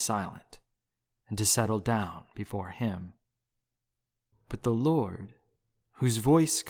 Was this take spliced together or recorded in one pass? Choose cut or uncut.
cut